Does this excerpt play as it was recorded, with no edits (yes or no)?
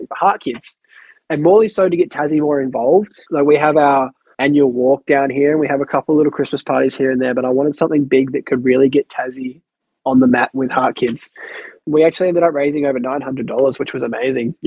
yes